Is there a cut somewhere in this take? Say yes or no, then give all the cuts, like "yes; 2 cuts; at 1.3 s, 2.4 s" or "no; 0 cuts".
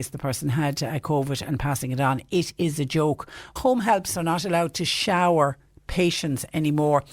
yes; 1 cut; at 3.6 s